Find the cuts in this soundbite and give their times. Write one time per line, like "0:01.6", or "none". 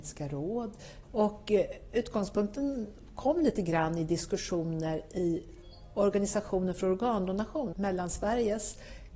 0:01.0
0:07.7